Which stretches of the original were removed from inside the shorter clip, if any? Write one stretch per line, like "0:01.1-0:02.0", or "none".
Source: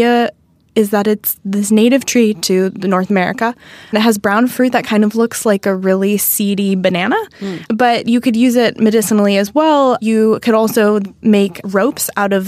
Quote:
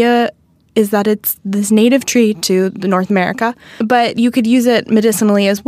0:03.8-0:07.7